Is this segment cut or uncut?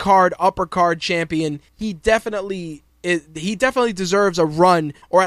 uncut